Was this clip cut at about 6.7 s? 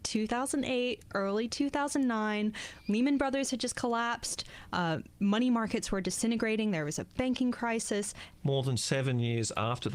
no; 1 cut; at 8.4 s

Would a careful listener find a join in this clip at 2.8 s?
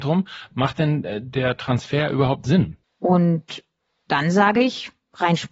yes; 1 cut; at 2.8 s

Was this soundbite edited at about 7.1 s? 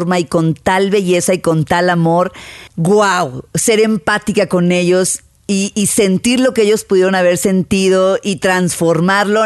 no; 1 cut; at 2.7 s

